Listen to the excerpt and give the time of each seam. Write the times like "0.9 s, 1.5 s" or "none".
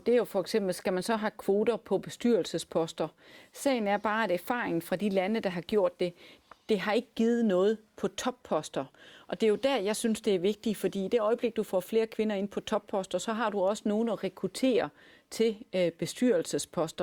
none

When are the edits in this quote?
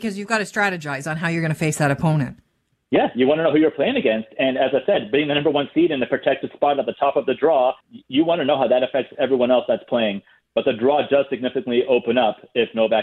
7.8 s

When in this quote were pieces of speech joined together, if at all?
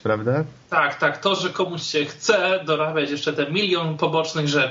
none

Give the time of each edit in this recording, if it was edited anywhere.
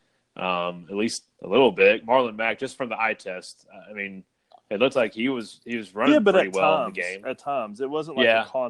none

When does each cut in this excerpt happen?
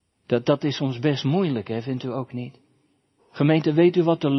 3.2 s

